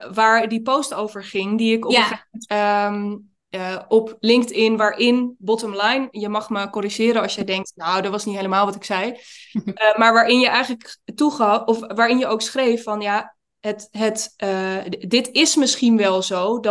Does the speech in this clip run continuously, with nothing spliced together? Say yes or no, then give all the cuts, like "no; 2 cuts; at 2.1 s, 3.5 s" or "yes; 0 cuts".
no; 1 cut; at 2.5 s